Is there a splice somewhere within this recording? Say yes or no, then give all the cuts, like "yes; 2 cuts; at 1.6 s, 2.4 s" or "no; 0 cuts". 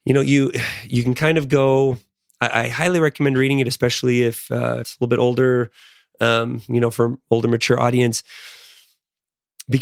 yes; 1 cut; at 4.8 s